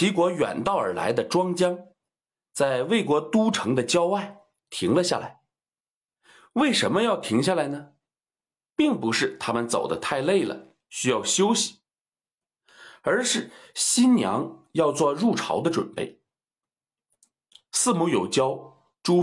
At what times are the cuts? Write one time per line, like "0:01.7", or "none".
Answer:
none